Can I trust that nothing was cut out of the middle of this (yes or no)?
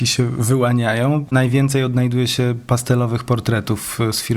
no